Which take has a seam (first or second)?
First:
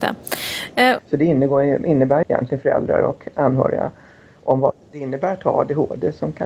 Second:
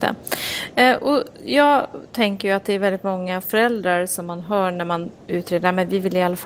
first